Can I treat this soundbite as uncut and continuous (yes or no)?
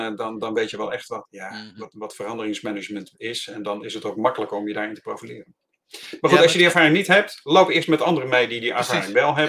no